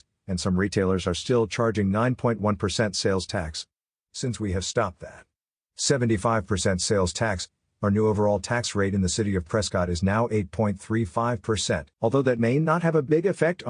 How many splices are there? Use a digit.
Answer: 1